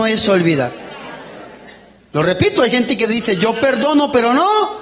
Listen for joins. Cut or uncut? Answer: uncut